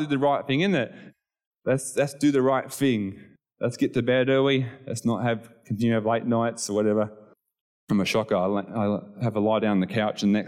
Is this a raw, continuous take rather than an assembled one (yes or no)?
no